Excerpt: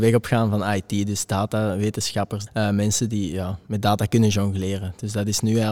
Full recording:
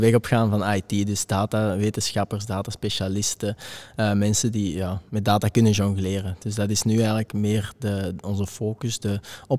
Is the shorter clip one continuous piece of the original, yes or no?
no